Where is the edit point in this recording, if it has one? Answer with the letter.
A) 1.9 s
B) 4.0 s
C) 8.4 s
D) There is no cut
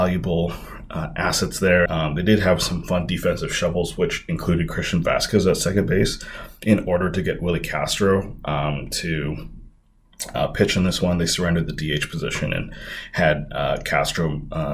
A